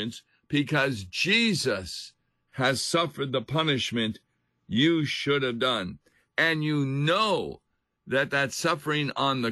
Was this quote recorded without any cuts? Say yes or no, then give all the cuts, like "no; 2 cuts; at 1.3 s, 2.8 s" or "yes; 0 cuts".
yes; 0 cuts